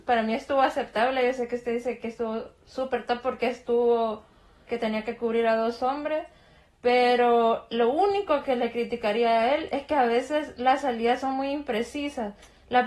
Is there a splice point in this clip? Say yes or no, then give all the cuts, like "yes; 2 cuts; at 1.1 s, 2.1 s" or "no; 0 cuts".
yes; 1 cut; at 4.7 s